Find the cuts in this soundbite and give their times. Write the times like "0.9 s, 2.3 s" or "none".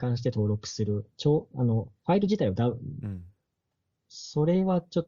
1.1 s, 3.0 s